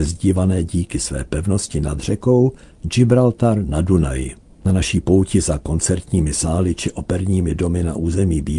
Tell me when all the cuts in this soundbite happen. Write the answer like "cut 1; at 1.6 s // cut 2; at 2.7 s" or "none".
cut 1; at 4.5 s